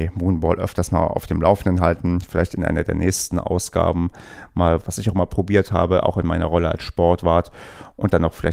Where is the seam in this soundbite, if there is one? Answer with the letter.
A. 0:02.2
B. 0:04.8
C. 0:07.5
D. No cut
B